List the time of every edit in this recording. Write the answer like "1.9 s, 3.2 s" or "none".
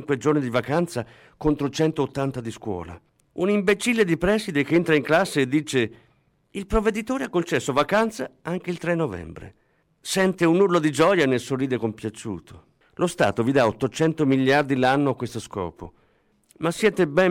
3.2 s, 12.8 s